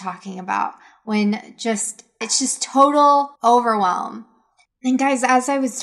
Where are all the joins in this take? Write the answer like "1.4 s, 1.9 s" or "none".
2.2 s, 3.4 s

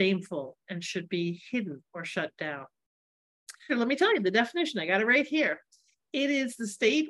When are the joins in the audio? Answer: 3.7 s

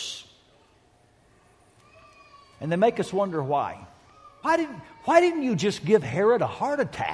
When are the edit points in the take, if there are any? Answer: 4.4 s

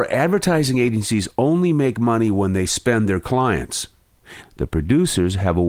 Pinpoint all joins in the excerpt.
4.4 s

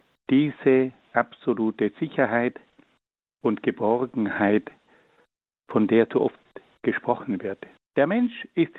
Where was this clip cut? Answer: 7.8 s

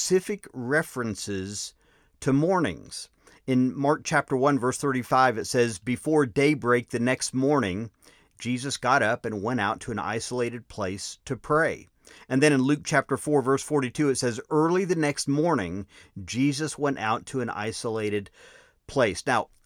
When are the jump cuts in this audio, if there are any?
none

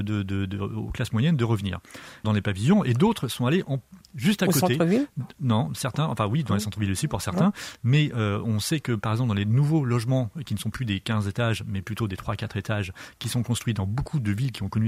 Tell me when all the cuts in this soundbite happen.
2.2 s

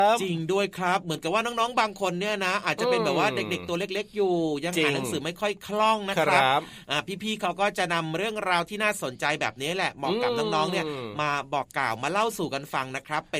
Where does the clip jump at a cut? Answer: none

